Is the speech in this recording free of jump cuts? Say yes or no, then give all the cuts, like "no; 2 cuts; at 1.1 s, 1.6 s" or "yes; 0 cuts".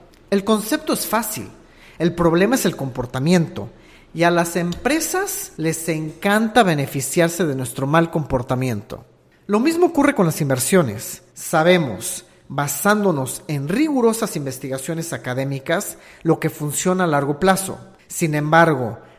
yes; 0 cuts